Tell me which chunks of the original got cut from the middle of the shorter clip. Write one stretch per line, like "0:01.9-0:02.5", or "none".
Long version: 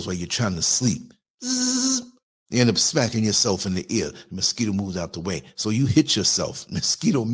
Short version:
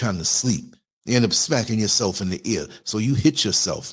0:01.4-0:02.4
0:04.3-0:05.5